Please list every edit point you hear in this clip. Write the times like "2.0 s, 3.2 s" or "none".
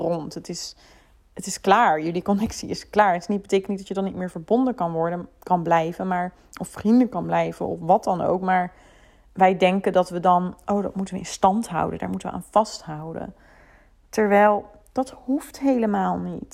none